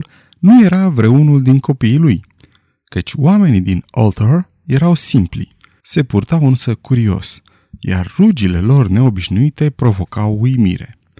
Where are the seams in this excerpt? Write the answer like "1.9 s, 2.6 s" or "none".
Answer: 5.8 s